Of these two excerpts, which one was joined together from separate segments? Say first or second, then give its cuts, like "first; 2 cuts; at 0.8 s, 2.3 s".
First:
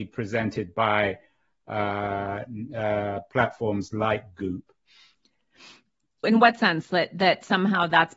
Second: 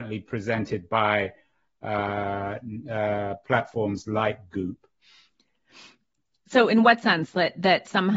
first; 1 cut; at 6.2 s